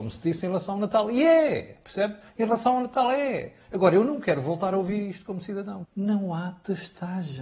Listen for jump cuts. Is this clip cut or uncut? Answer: cut